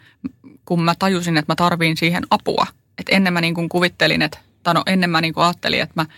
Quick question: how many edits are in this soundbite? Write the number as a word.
zero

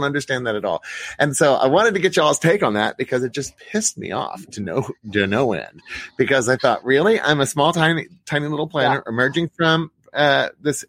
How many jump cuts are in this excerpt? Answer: zero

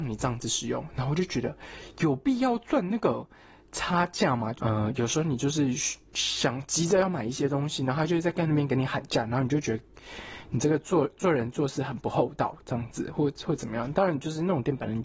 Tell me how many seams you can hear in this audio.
one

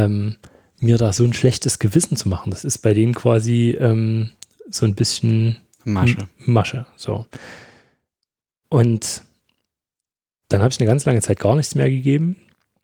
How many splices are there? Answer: zero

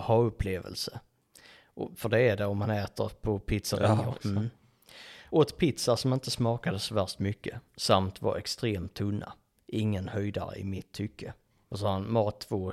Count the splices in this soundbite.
one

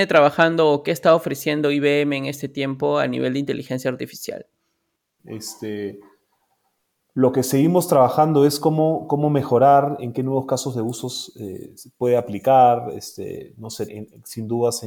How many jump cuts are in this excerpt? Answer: two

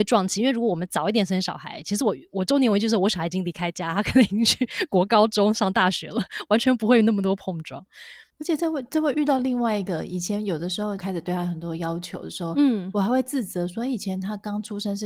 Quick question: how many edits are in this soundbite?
one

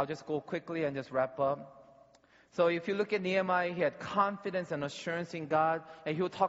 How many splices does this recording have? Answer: zero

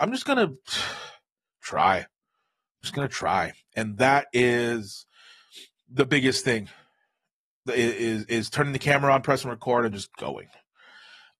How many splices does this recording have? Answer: zero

